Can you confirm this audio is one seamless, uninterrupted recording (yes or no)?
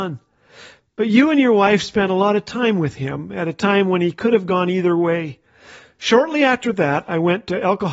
yes